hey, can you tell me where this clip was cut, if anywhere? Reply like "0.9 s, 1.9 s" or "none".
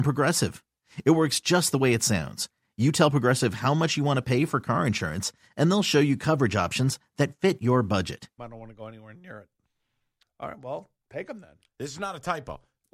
8.4 s, 10.2 s, 11.7 s